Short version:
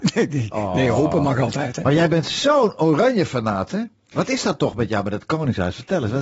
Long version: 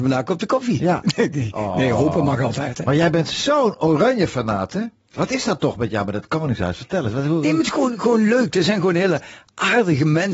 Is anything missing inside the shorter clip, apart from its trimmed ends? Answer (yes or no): no